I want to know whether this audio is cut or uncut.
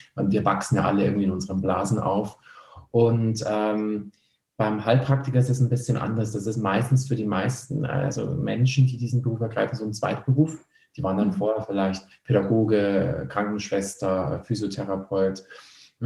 uncut